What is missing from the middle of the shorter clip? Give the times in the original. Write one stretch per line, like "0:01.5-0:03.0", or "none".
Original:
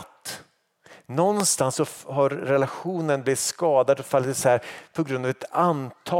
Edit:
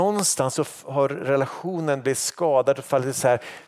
none